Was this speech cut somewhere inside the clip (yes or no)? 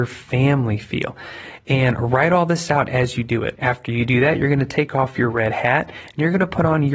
no